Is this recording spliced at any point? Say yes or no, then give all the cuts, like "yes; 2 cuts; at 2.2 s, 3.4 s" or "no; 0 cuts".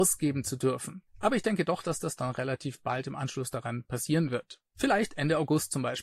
no; 0 cuts